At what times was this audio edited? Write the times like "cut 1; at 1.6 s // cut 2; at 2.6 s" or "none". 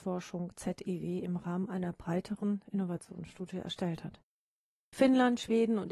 cut 1; at 4.8 s